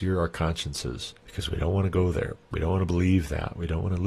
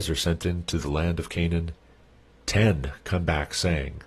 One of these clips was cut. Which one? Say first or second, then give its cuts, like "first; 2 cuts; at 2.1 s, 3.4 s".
first; 2 cuts; at 1.2 s, 2.3 s